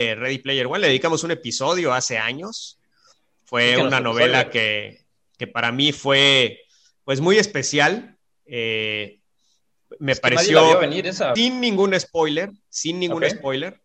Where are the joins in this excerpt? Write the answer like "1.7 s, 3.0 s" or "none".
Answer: 11.4 s